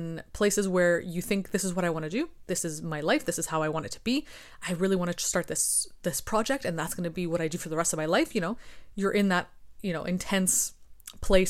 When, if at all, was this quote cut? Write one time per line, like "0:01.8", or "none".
none